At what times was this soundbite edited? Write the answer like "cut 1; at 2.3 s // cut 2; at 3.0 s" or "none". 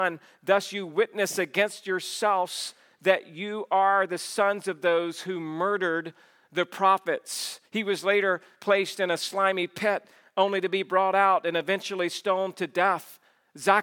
cut 1; at 7.6 s